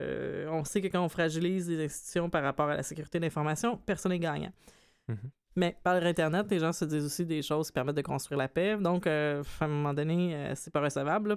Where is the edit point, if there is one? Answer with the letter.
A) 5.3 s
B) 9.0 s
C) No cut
A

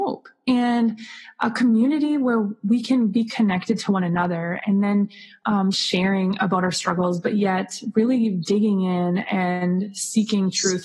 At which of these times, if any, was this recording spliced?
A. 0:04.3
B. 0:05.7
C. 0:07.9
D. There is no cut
B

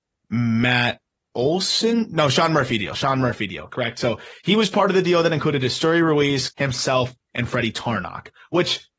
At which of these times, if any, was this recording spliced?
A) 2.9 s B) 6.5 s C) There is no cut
B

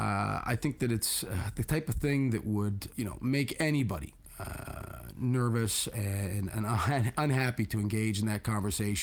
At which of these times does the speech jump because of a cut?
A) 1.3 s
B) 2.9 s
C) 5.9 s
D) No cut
B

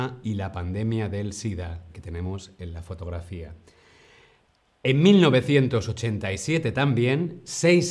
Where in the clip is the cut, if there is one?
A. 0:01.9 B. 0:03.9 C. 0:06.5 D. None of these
A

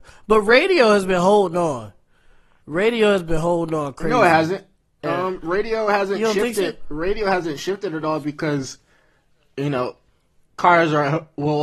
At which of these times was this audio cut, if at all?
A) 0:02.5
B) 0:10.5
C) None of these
B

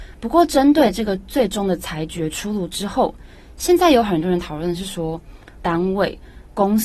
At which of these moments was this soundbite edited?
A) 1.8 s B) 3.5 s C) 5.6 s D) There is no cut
C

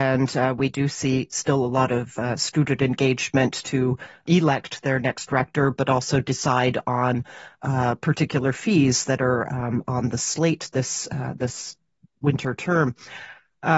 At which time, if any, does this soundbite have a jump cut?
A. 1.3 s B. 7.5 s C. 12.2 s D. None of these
D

